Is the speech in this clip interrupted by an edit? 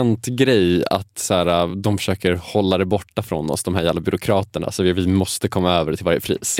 no; 0 cuts

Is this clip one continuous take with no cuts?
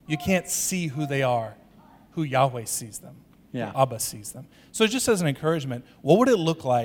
yes; 0 cuts

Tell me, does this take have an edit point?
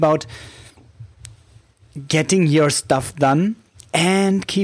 no; 0 cuts

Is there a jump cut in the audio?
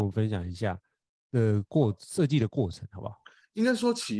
no; 0 cuts

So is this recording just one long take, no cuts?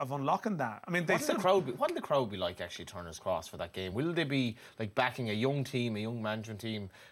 yes; 0 cuts

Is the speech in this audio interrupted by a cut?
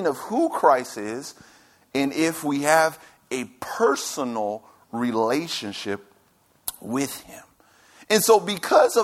no; 0 cuts

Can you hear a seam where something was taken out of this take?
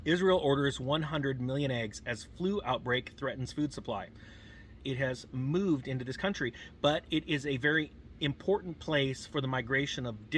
yes; 1 cut; at 4.8 s

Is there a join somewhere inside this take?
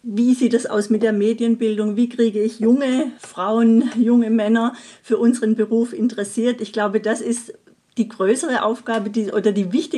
no; 0 cuts

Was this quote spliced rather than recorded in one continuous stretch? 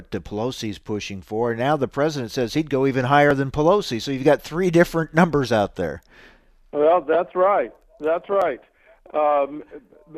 no; 0 cuts

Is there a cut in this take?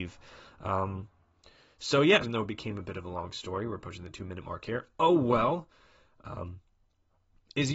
yes; 1 cut; at 2.2 s

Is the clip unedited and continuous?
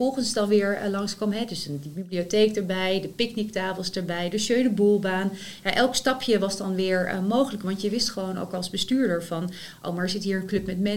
yes; 0 cuts

